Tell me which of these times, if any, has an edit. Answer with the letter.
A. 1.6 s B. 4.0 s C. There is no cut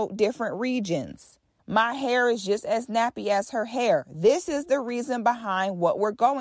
A